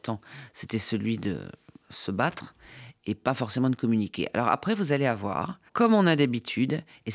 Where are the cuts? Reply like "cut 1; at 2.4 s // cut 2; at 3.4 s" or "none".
cut 1; at 5.7 s